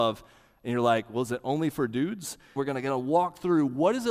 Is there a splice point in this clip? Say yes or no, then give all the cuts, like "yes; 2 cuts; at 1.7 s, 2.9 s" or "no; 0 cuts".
yes; 1 cut; at 2.6 s